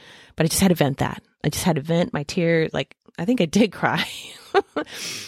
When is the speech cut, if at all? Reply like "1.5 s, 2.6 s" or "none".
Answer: none